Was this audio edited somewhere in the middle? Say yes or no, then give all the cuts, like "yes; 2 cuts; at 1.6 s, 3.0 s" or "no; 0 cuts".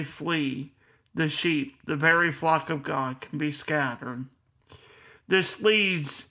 no; 0 cuts